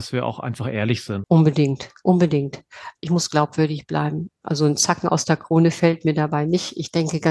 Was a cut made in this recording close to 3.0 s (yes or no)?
yes